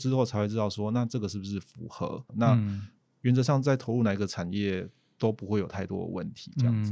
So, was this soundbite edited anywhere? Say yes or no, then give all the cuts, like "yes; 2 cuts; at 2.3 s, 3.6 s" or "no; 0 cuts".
yes; 1 cut; at 2.3 s